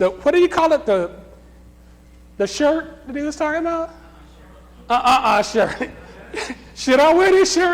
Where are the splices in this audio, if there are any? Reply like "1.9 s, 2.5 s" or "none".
none